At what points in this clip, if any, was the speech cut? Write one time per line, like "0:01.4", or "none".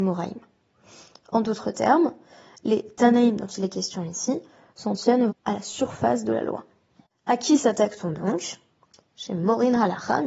0:05.3

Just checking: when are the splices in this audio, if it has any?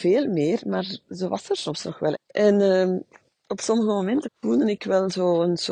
0:02.1
0:04.2

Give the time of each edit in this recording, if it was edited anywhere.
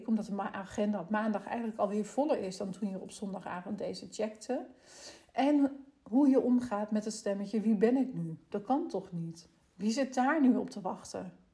none

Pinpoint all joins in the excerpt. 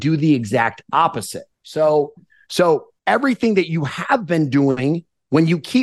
0:01.5
0:03.0

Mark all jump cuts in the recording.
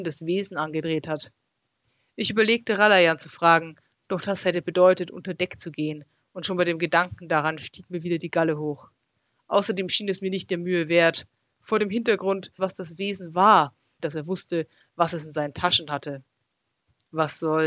0:12.6
0:14.0

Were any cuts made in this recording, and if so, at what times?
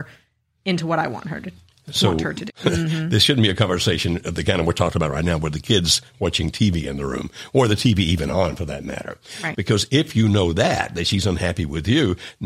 0:02.5
0:09.5

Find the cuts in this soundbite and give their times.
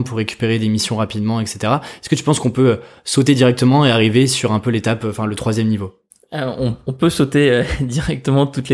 none

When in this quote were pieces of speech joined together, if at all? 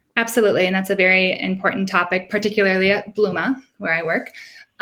none

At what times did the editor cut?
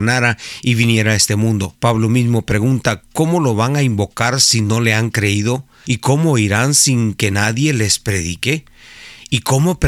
0:01.8
0:05.8

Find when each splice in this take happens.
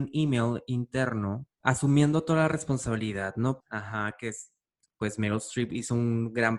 0:03.6

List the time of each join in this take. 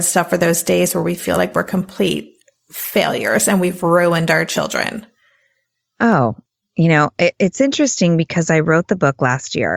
none

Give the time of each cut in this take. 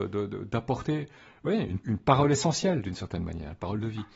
0:01.8

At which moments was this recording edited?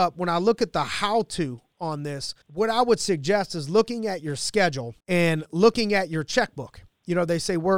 0:02.4
0:05.0

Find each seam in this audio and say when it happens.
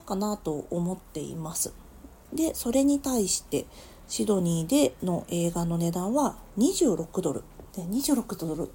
0:07.7

